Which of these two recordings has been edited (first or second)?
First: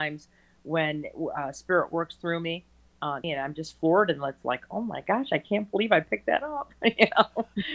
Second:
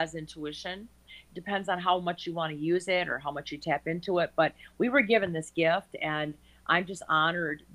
first